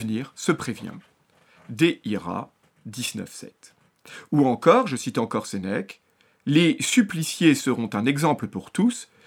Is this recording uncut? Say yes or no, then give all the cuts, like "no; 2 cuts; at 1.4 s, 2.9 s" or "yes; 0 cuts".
yes; 0 cuts